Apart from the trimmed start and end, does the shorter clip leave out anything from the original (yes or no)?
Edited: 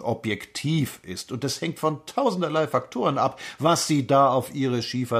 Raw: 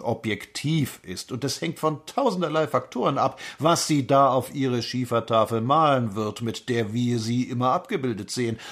no